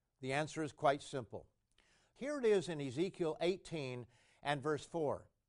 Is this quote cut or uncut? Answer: cut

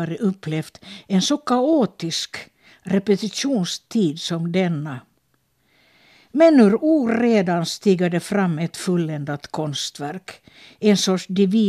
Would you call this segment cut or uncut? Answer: uncut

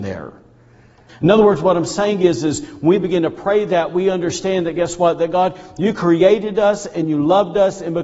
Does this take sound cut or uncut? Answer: cut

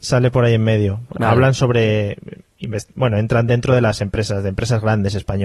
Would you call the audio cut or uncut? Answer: uncut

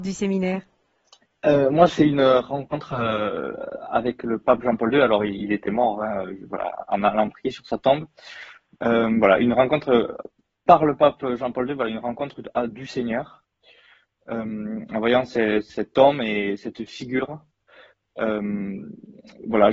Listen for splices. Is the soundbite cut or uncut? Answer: uncut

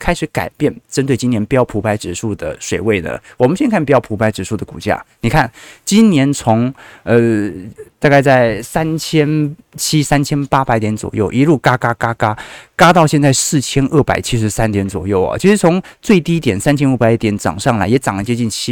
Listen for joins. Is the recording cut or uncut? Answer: uncut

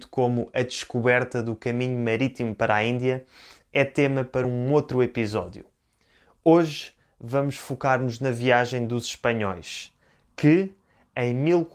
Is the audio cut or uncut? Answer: uncut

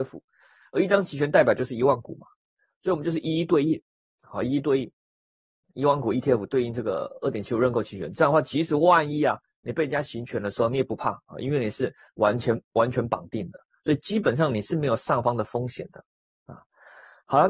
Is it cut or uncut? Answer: uncut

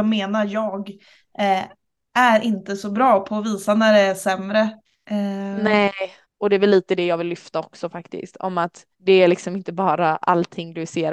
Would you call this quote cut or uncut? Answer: cut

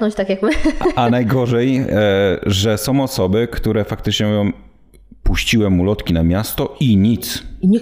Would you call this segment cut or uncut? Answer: uncut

